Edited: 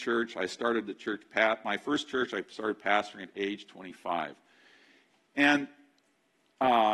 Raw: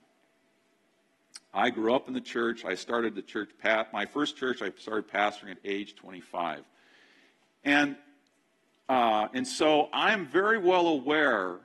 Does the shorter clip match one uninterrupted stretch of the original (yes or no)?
yes